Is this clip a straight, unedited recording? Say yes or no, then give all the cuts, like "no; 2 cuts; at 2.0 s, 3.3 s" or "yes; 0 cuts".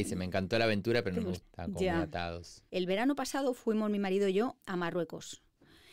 no; 3 cuts; at 1.4 s, 2.7 s, 4.6 s